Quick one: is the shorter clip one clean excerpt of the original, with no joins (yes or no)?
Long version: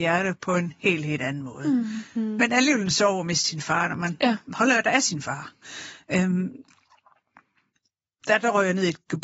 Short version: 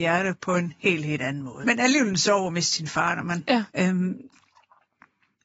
no